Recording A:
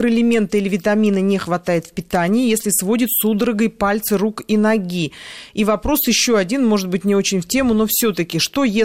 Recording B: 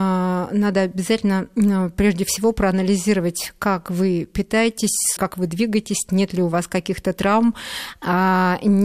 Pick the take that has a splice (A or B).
B